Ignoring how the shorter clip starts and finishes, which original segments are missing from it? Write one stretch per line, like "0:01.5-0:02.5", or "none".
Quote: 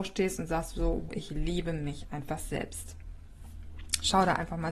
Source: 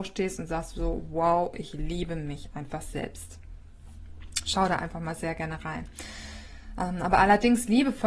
0:01.1-0:01.5